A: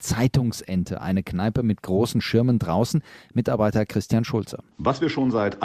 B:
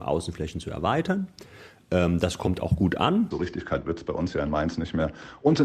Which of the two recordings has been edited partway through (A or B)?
B